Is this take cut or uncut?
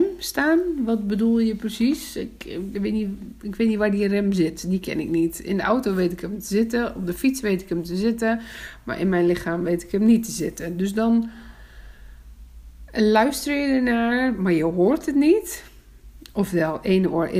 uncut